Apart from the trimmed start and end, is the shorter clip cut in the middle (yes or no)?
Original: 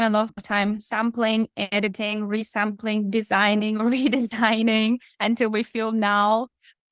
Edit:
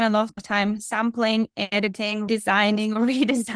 yes